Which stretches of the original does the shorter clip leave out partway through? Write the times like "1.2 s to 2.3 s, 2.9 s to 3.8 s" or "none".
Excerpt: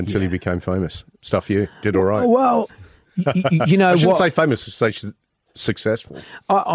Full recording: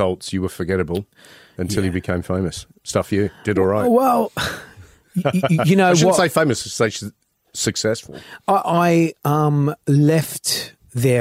4.3 s to 4.7 s